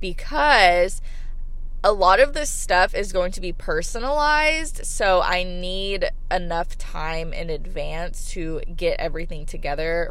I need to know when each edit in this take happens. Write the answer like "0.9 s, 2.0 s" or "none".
none